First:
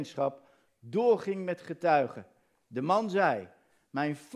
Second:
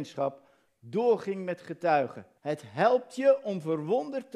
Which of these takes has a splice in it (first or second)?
second